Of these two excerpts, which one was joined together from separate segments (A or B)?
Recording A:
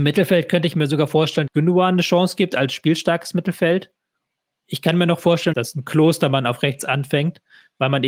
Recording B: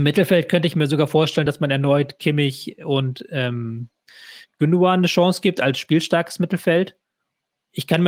A